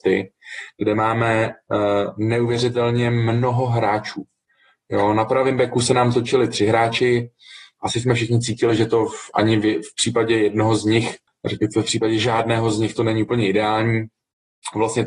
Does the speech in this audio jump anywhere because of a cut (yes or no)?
no